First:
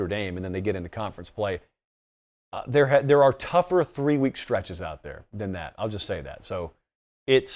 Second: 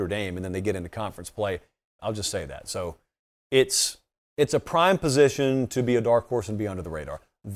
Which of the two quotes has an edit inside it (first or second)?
second